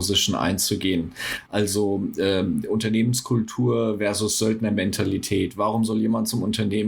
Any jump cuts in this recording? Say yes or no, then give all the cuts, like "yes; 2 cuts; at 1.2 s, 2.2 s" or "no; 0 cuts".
no; 0 cuts